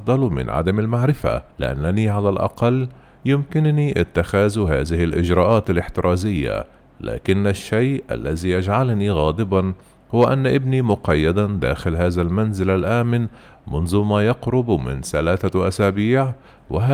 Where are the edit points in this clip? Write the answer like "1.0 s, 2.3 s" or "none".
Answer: 1.5 s